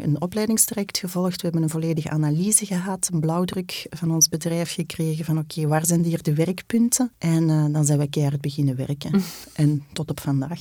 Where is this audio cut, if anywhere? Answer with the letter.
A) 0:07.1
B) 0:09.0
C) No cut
A